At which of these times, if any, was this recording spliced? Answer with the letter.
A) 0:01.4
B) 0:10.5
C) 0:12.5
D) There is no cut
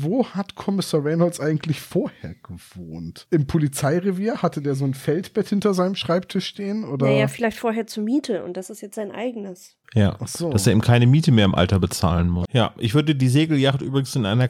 C